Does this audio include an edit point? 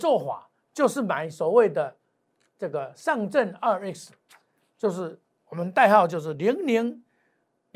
no; 0 cuts

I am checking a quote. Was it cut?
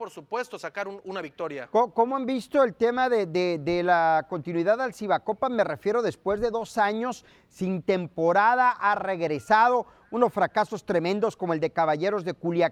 no; 0 cuts

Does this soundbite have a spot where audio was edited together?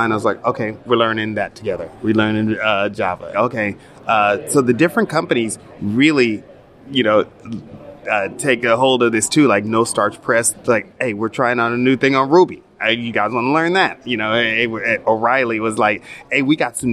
yes; 2 cuts; at 3.3 s, 10.5 s

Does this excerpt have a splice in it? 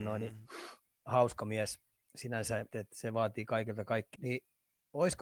yes; 2 cuts; at 2.7 s, 4.1 s

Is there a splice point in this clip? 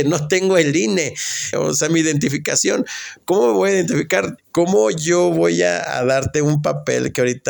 yes; 2 cuts; at 1.5 s, 4.4 s

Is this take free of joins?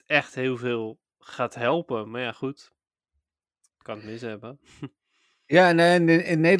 yes; 0 cuts

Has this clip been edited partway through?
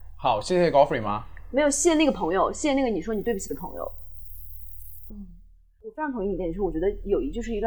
yes; 1 cut; at 5.1 s

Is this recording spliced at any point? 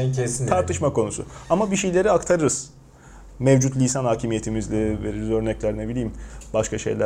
no; 0 cuts

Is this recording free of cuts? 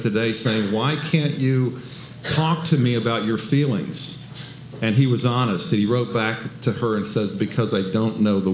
yes; 0 cuts

